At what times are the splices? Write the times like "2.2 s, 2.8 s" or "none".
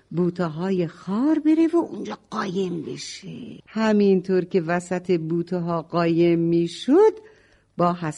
3.6 s